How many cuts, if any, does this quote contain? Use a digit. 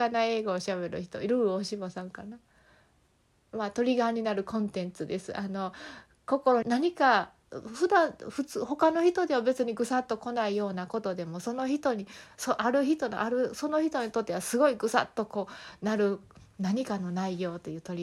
1